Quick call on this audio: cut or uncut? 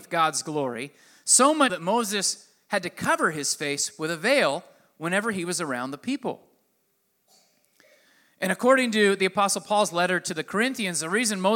cut